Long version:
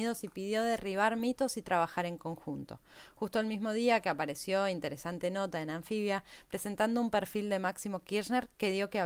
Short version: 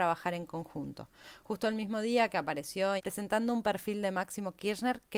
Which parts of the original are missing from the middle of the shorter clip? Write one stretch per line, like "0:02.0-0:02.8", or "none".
0:04.7-0:06.4

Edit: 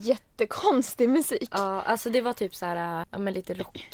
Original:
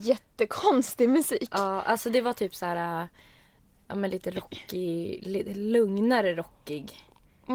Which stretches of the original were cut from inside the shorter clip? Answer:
0:03.0-0:03.8

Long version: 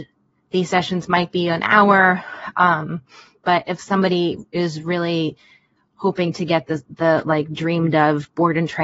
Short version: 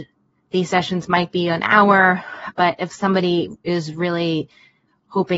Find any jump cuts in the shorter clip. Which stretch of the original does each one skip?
0:02.5-0:03.4

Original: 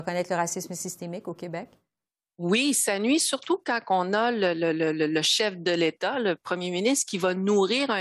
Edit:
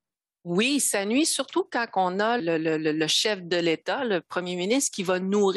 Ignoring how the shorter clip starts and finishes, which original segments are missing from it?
0:04.3-0:04.5

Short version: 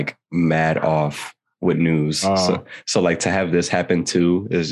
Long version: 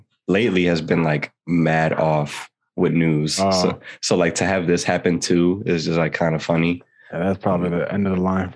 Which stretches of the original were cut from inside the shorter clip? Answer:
none

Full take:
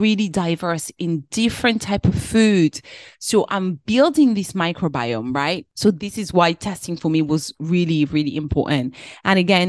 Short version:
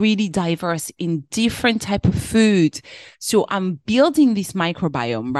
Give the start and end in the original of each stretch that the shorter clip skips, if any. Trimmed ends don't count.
none

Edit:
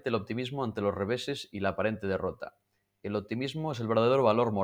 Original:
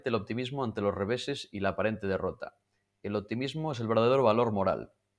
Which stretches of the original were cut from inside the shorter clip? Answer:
none

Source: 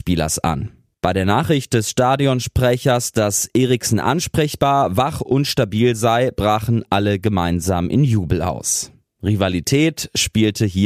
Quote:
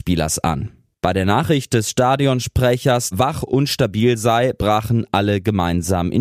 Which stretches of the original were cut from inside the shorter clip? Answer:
0:03.1-0:04.9

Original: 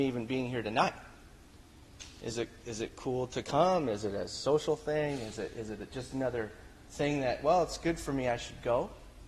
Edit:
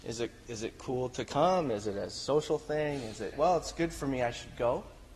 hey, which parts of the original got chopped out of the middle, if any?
0:05.5-0:07.4

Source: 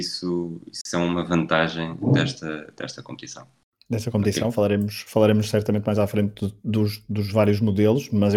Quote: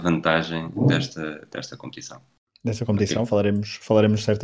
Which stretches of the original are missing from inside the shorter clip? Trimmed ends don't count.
none

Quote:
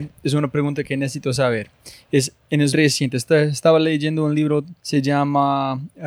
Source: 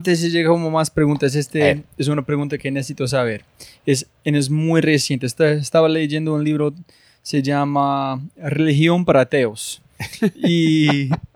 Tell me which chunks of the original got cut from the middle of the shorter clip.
0:04.5-0:04.8
0:06.9-0:07.2

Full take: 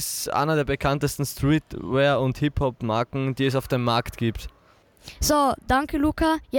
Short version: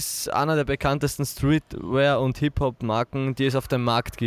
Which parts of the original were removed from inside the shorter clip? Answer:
none

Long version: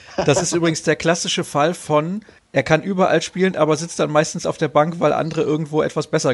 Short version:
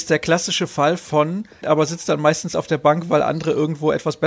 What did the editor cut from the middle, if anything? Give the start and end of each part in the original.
0:02.4-0:03.5

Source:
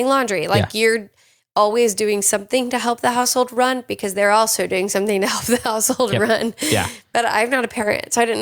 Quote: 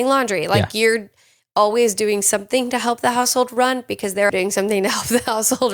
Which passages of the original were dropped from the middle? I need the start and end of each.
0:04.3-0:04.7

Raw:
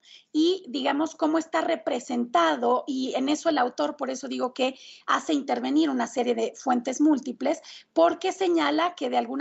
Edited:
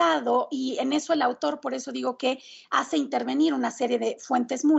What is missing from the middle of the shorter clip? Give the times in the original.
none

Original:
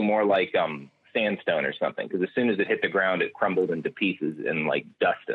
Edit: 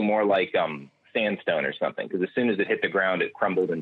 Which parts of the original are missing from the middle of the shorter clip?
none

